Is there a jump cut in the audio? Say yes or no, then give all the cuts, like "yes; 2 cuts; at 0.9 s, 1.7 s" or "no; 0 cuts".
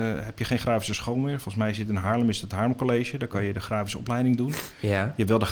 no; 0 cuts